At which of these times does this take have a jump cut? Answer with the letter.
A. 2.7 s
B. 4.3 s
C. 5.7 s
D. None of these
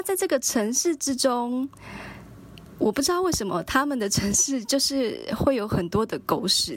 D